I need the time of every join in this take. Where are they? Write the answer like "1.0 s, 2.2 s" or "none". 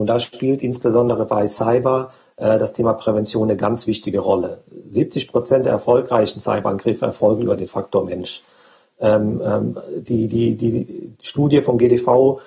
none